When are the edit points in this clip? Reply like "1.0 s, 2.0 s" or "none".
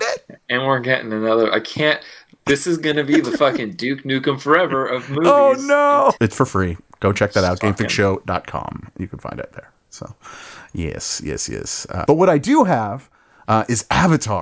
6.2 s, 12.0 s